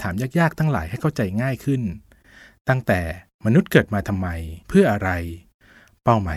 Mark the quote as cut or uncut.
cut